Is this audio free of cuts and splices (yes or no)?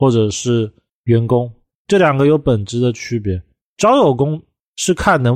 no